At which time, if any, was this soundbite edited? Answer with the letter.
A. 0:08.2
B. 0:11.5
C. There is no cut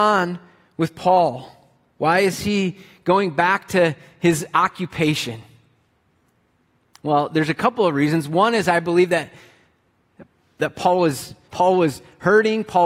B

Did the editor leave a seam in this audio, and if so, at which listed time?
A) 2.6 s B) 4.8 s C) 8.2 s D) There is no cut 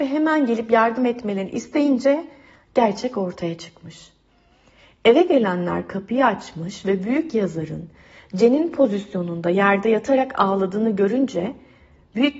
D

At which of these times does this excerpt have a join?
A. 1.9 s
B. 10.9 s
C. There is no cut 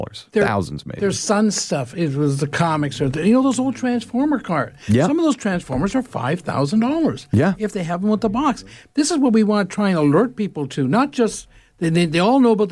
C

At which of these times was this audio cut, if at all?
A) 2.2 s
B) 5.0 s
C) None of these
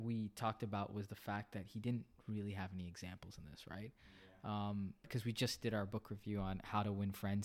B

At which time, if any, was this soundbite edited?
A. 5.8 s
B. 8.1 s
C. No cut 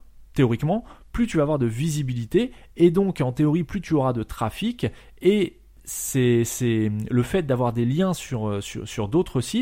C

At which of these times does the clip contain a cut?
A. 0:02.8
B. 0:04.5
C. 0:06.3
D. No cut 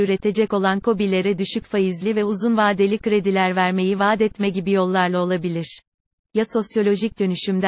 C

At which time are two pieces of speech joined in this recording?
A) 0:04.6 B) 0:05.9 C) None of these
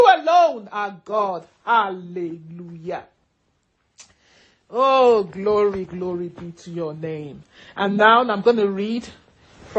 B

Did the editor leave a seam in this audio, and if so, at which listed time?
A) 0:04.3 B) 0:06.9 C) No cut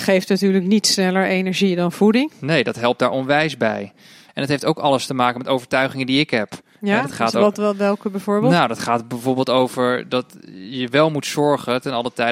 A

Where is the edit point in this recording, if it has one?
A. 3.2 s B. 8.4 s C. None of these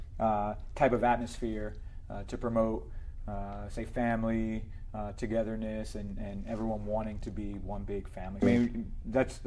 B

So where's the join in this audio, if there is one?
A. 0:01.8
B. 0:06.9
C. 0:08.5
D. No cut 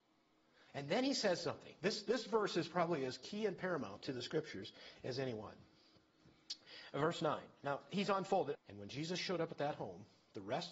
C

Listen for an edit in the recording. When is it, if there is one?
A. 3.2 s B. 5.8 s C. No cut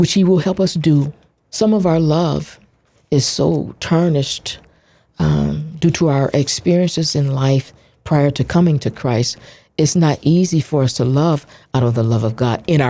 C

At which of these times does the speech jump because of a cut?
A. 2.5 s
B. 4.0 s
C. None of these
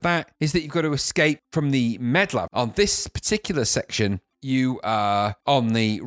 A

